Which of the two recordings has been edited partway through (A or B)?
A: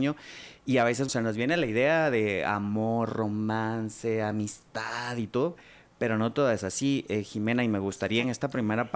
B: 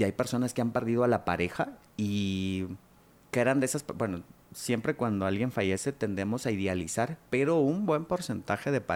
A